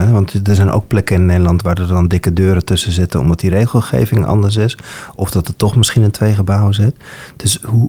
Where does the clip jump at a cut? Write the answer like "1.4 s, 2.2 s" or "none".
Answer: none

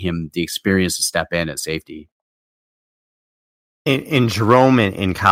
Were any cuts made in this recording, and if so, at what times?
none

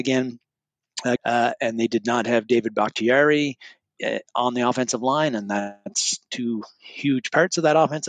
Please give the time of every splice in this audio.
1.2 s

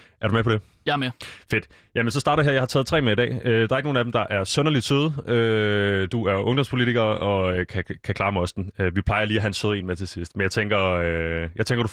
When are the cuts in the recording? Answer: none

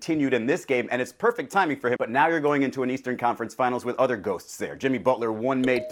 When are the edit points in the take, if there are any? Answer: 2.0 s

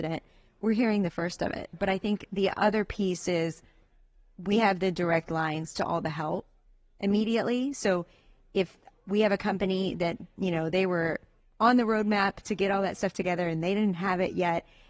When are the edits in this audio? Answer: 1.7 s

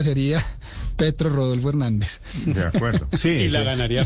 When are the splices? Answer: none

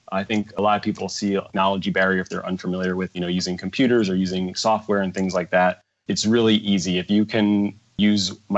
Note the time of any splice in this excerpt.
none

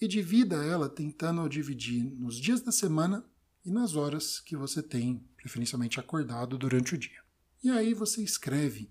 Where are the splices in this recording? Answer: 5.3 s

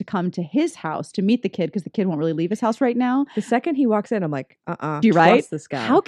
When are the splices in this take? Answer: 5.0 s

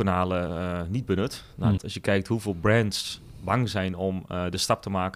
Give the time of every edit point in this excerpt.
1.8 s

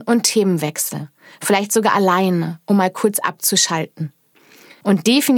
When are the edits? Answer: none

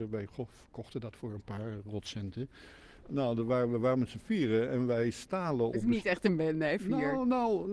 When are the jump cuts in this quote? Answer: 3.0 s

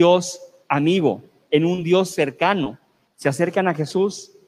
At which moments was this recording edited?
1.4 s, 3.1 s

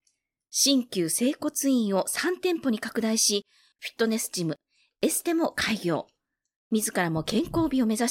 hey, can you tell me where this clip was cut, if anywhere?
3.7 s

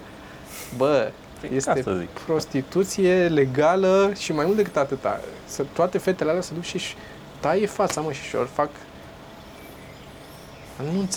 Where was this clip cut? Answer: none

